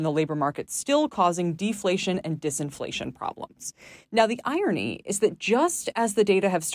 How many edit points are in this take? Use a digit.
0